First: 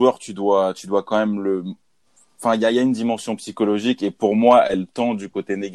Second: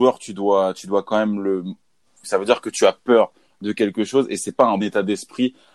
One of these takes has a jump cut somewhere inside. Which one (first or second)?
second